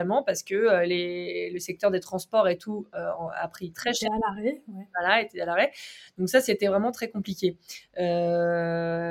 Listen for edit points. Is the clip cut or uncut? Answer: uncut